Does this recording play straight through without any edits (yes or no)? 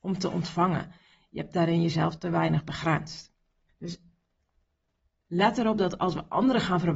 no